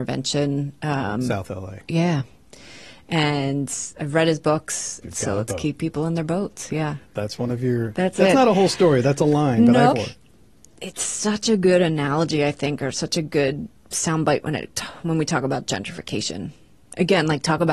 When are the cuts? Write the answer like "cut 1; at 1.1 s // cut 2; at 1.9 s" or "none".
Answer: cut 1; at 5.0 s // cut 2; at 9.9 s